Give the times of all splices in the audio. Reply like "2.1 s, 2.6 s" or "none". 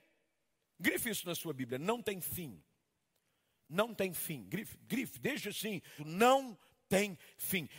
6.0 s